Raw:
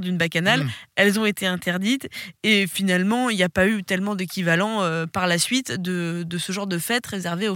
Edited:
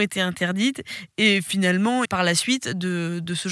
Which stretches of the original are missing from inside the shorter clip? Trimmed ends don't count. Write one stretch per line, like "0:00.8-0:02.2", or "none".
0:03.3-0:05.1